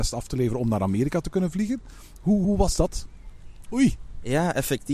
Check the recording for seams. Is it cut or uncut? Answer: cut